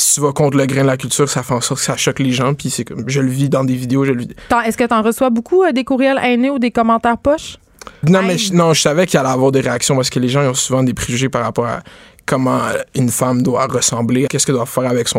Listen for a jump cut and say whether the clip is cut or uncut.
cut